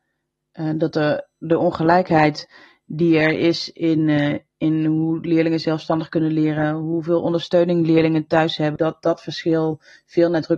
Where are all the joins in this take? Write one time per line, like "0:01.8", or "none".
0:08.8